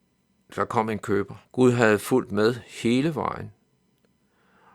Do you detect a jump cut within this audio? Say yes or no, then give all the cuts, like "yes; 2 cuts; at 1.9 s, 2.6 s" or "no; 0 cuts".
yes; 1 cut; at 1.4 s